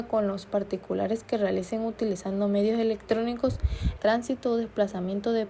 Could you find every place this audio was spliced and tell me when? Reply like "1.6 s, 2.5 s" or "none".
4.0 s